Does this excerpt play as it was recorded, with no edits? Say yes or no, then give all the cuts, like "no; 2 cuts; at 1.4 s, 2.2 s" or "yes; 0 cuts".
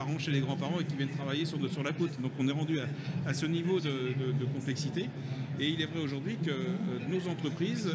yes; 0 cuts